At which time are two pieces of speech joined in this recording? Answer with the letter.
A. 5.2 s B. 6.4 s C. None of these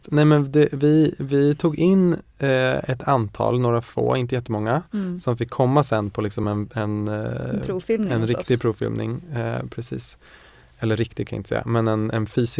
C